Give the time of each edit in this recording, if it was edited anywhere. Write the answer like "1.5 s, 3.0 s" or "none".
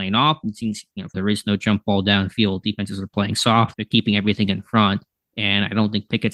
1.1 s, 3.7 s

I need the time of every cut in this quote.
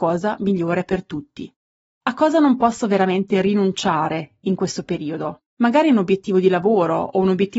5.5 s

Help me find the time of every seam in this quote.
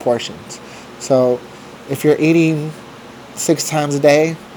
none

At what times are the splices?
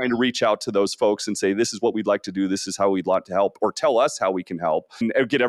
none

